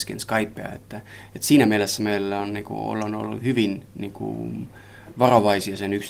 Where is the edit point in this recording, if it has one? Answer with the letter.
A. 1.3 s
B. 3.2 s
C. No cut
C